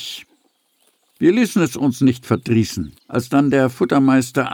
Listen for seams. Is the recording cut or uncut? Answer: cut